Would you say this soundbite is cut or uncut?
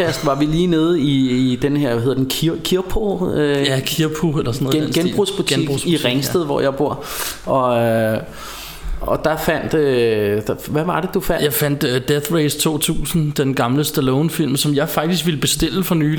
uncut